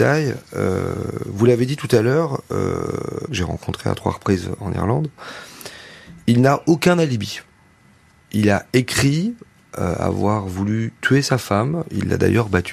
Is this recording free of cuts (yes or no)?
no